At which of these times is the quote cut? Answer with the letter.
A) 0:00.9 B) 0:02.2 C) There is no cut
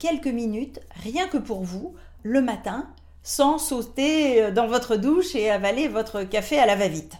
B